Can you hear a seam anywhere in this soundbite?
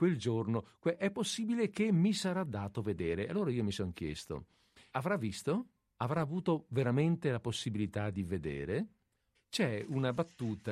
yes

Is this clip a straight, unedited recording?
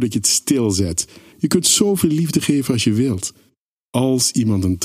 no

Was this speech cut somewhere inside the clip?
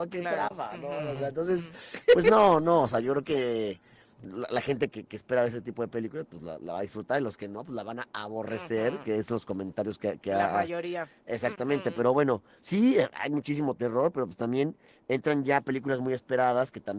yes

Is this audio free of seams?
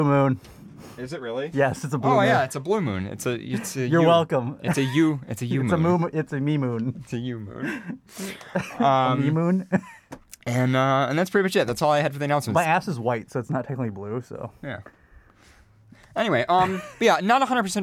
yes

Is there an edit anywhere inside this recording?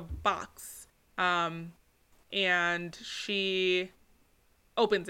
no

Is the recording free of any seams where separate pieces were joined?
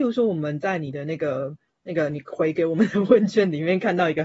yes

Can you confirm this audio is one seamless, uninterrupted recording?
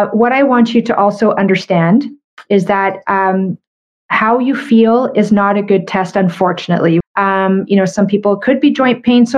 no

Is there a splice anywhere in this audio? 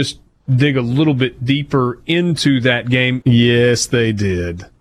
yes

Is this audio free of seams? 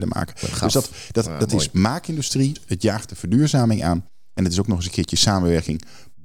no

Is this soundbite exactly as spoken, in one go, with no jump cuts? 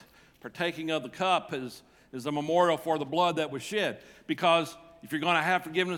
yes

